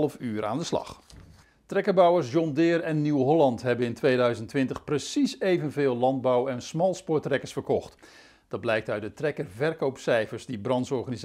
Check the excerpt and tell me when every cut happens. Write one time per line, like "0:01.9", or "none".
none